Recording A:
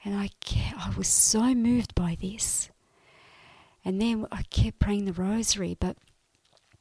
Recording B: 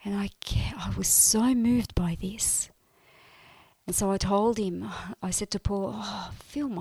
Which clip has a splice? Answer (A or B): B